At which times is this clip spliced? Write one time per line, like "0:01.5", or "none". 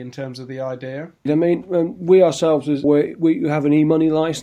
0:01.3
0:02.8